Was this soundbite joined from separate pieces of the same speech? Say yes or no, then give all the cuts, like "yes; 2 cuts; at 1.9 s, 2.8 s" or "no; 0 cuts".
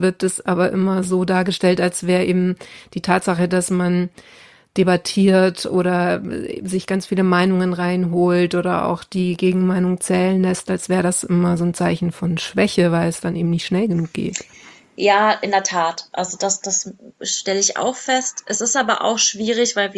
no; 0 cuts